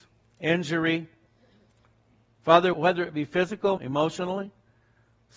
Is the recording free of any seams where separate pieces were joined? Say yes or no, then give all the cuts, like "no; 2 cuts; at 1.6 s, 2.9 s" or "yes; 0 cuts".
no; 2 cuts; at 2.7 s, 3.8 s